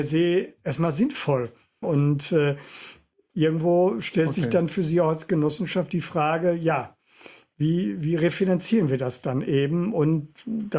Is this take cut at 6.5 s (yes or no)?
no